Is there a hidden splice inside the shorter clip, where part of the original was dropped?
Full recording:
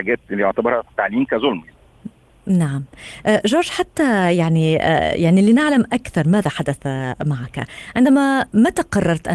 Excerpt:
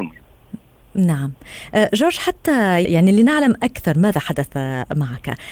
yes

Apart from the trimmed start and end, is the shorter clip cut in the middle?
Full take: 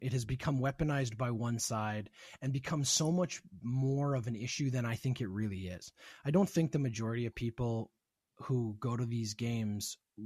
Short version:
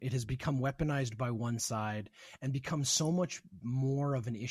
no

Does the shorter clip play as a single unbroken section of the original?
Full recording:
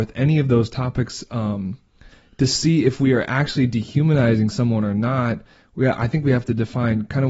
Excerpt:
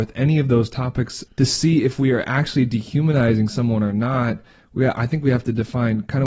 no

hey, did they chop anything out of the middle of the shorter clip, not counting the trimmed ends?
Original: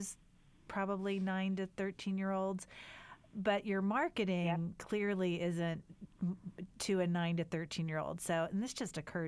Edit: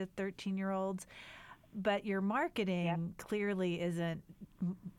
no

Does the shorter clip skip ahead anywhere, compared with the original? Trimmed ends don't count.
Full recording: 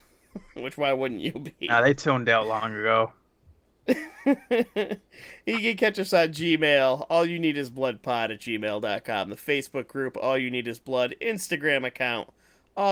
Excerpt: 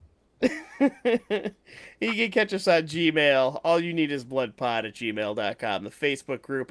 no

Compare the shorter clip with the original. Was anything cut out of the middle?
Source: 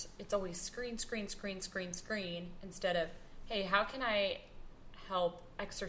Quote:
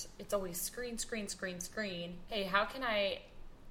yes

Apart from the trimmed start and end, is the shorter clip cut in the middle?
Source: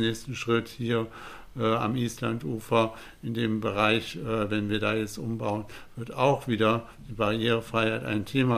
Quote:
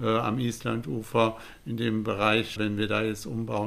yes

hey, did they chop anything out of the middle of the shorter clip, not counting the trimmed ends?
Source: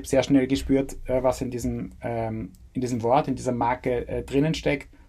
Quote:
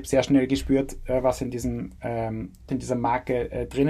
yes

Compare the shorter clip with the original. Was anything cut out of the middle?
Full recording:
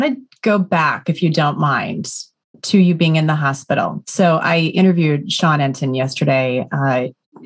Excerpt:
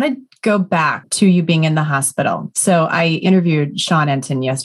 yes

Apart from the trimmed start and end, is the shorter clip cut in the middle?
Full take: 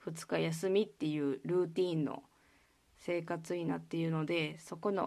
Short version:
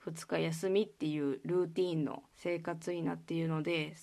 yes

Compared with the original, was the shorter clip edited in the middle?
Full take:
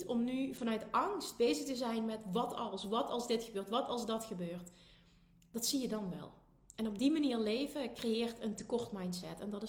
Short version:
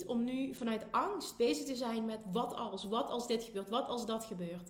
no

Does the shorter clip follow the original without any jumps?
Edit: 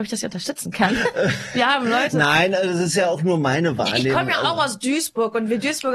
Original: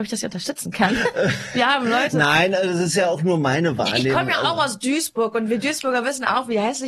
yes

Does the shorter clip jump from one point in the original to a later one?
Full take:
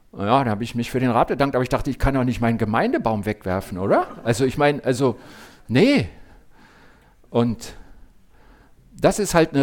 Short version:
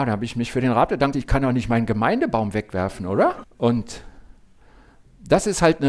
yes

